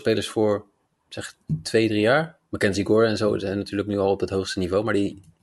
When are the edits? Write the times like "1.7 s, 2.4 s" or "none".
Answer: none